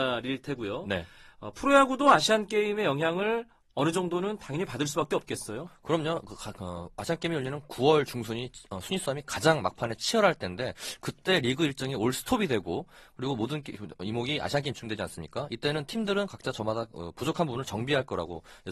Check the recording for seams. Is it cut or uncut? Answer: uncut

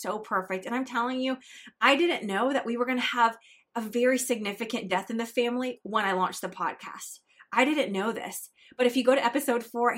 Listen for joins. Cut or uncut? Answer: uncut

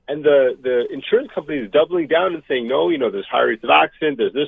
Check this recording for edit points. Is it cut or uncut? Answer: uncut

